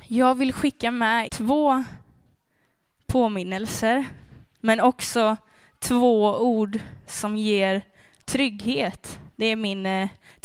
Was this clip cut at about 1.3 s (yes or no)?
yes